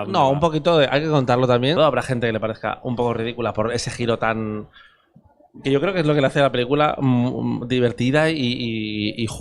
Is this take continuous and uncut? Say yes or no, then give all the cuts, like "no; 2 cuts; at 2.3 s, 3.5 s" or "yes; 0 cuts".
no; 1 cut; at 1.8 s